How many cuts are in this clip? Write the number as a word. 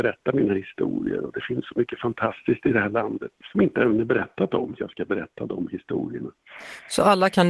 one